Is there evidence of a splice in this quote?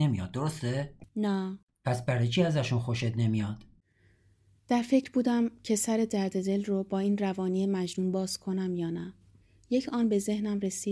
yes; 1 cut; at 1.1 s

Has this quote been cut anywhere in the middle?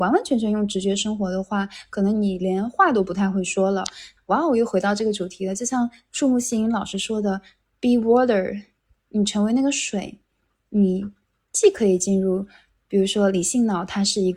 yes; 1 cut; at 4.2 s

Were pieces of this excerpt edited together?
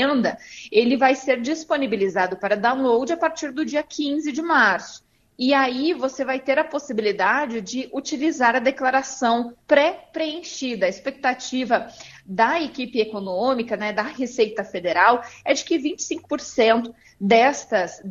yes; 1 cut; at 9.6 s

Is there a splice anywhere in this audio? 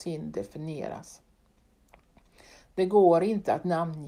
yes; 1 cut; at 2.6 s

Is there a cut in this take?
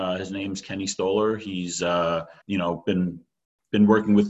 yes; 1 cut; at 2.4 s

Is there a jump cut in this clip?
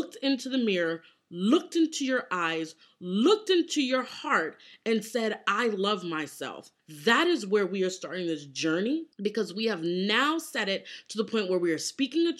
yes; 1 cut; at 6.8 s

